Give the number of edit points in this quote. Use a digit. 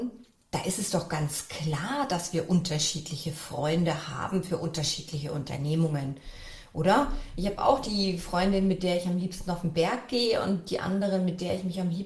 0